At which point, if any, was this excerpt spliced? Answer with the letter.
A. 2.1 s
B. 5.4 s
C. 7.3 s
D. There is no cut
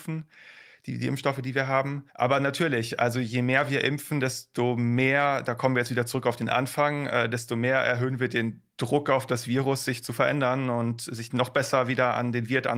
A